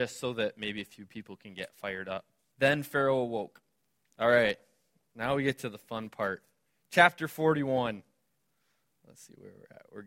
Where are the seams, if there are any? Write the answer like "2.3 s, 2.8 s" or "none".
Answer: 2.5 s, 4.1 s